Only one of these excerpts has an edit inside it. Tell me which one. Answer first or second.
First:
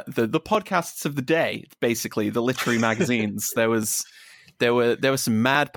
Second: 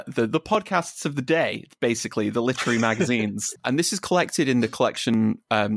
second